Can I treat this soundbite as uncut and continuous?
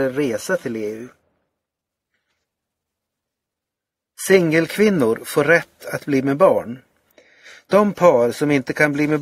yes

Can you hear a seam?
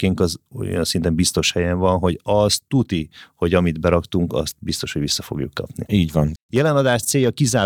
yes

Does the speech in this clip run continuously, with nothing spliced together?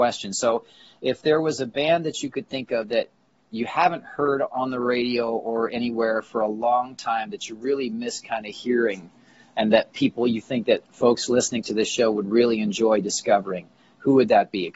yes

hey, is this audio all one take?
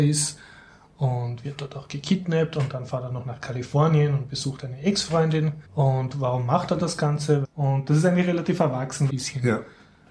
no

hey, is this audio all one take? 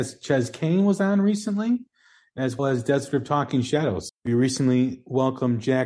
no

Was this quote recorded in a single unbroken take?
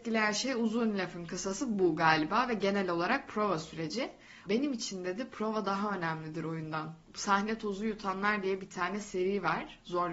no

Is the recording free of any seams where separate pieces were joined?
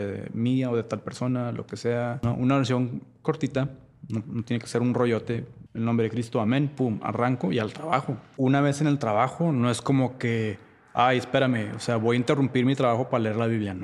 yes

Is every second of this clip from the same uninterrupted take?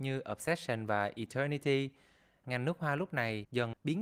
no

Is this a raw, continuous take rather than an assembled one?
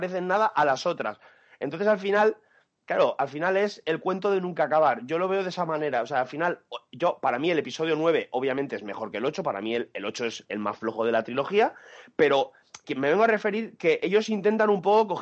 no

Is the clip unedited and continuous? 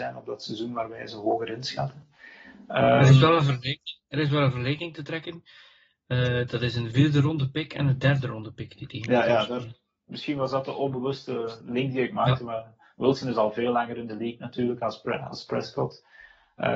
yes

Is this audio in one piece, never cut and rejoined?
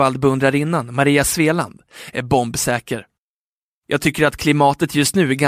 no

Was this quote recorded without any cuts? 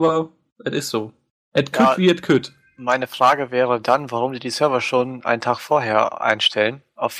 yes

